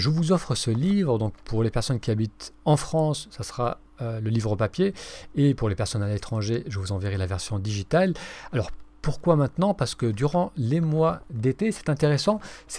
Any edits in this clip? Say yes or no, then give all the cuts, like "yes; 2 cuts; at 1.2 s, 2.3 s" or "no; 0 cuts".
no; 0 cuts